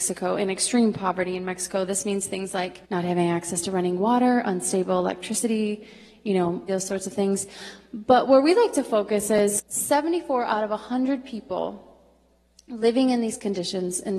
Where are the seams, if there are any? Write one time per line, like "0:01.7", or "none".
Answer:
0:02.8
0:06.7